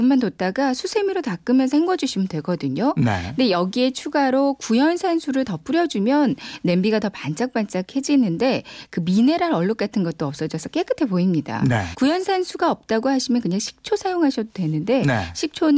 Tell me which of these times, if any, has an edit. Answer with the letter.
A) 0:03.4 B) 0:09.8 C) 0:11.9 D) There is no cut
C